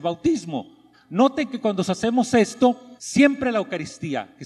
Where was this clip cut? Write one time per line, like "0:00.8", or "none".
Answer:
0:00.9
0:03.0